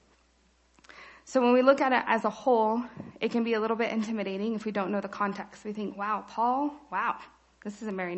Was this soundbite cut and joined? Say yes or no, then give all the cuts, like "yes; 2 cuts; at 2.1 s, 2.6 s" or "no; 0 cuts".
no; 0 cuts